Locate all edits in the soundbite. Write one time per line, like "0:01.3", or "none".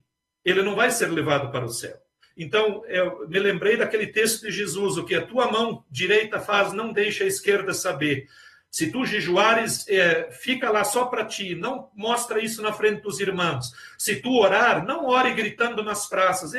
0:02.2